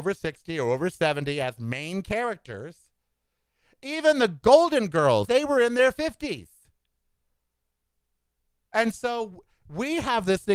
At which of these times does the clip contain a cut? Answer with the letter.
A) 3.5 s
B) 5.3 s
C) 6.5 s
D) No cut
B